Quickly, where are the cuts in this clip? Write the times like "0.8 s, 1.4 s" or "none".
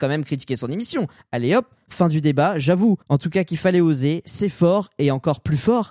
3.0 s

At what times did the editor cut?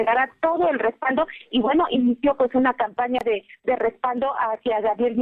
none

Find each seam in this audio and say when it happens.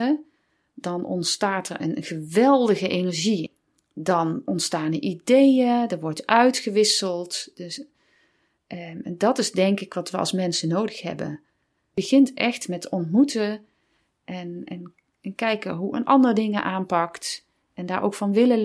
none

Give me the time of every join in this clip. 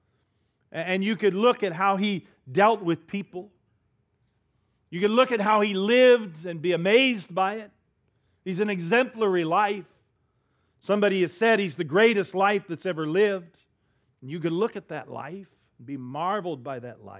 none

